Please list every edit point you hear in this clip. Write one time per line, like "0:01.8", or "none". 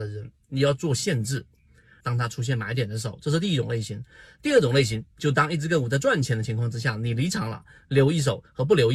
0:02.0

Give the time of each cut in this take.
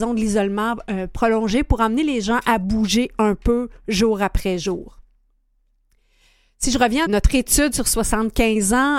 0:07.1

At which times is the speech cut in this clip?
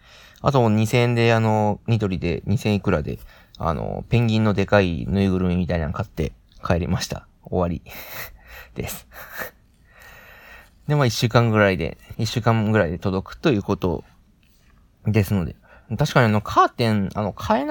0:12.1

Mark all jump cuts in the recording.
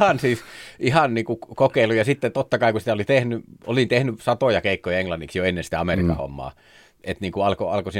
none

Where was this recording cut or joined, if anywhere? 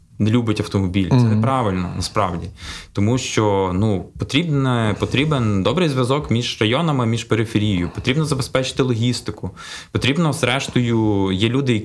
none

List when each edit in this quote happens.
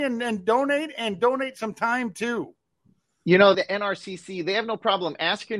0:03.5

